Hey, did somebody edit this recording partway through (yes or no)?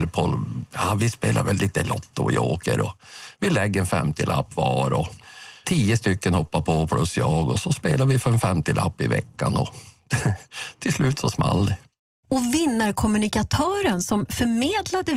yes